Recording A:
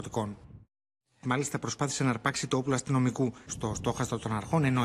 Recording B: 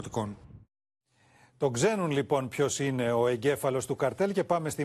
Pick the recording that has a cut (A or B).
A